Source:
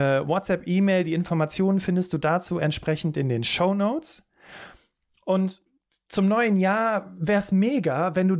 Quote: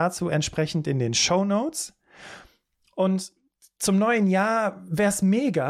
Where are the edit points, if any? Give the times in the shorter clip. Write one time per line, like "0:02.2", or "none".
none

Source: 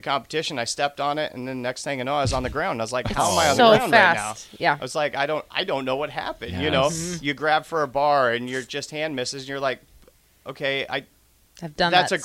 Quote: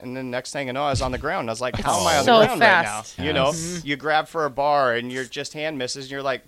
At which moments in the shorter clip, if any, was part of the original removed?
0:03.2

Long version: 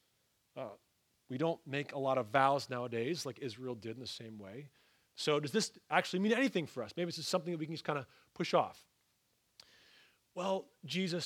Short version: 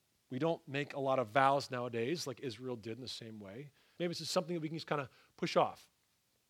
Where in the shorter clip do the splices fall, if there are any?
0:04.0

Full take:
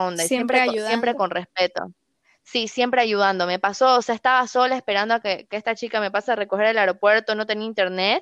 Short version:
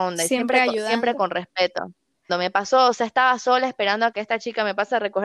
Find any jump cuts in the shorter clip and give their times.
0:02.3
0:04.1

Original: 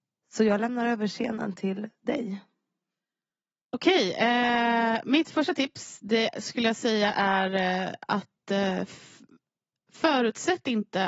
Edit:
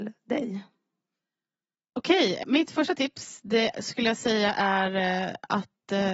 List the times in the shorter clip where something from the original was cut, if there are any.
0:02.4

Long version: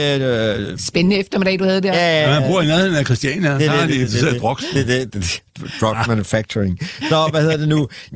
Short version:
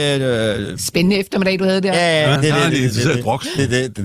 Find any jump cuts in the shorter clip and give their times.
0:02.4

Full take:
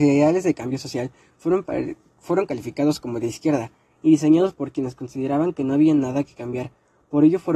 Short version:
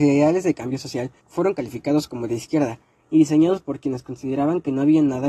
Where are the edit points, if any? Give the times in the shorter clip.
0:01.2

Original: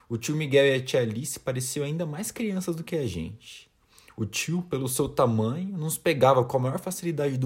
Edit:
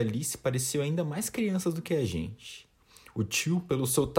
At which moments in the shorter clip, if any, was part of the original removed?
none

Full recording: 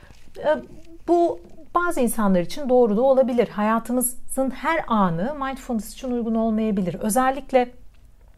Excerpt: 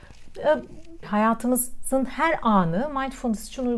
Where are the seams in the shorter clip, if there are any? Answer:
0:01.0

